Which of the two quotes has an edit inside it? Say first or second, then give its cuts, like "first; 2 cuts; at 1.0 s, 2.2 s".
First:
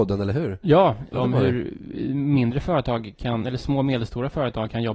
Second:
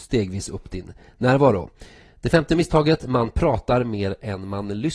first; 1 cut; at 1.1 s